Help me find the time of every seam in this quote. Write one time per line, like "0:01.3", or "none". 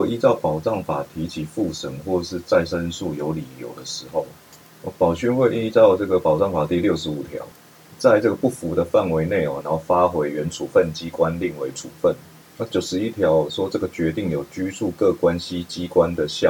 0:09.6